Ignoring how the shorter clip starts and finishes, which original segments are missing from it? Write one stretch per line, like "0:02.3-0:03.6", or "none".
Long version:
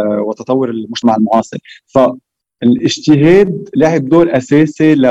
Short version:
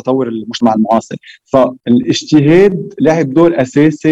0:02.2-0:02.6